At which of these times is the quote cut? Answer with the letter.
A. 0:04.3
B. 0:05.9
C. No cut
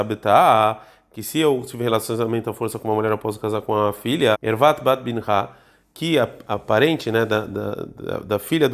A